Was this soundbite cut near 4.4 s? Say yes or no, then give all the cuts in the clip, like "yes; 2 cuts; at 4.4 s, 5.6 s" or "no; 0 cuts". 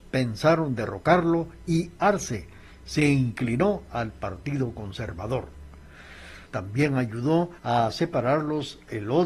no; 2 cuts; at 6.5 s, 7.6 s